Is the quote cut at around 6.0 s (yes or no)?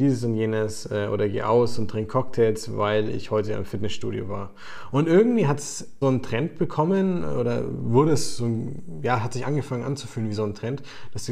yes